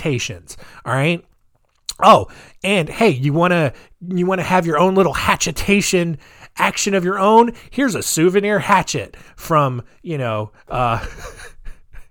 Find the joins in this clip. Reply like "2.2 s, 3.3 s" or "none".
none